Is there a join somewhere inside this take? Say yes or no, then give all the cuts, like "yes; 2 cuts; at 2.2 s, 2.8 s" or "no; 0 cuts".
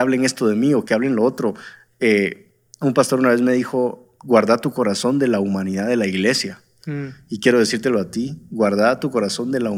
no; 0 cuts